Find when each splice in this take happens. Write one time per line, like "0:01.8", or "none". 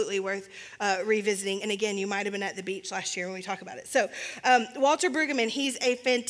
none